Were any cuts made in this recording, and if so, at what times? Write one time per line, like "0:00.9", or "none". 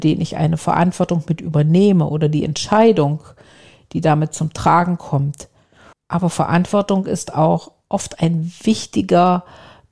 0:05.9

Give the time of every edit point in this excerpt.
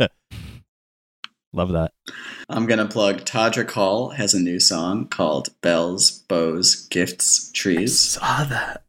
none

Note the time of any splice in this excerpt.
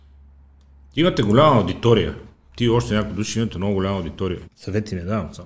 0:04.4

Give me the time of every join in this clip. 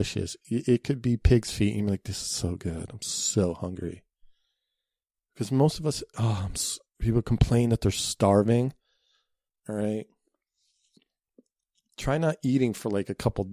0:06.1
0:09.5

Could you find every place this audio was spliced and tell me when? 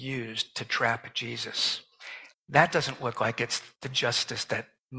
0:02.3

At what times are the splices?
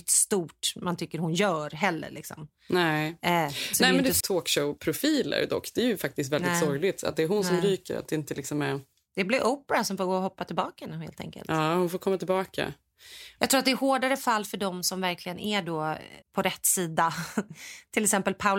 0:04.2
0:13.4
0:16.2

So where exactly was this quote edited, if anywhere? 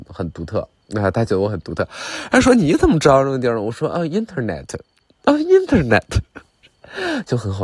none

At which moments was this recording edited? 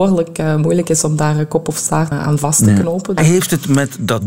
0:02.1
0:03.2

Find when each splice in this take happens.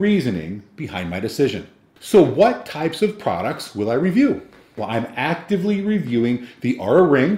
0:04.8

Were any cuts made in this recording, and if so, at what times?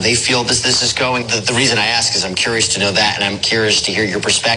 0:01.2
0:03.4

